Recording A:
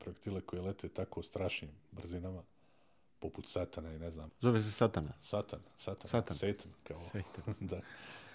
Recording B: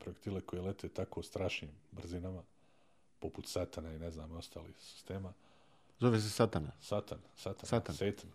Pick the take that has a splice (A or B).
A